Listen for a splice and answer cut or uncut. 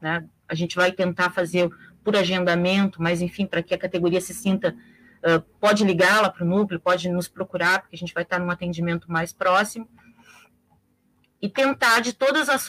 uncut